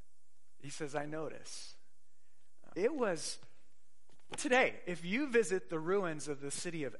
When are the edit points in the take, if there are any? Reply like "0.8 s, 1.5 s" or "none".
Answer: 2.7 s, 4.4 s